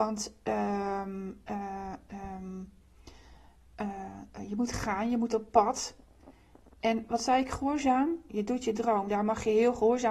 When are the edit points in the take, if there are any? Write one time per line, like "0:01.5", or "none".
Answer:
0:08.3